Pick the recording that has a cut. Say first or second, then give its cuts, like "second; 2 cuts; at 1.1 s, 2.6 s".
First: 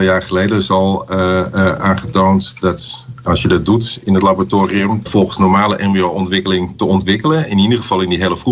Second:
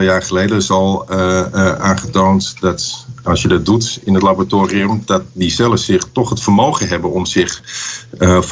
first; 1 cut; at 5.1 s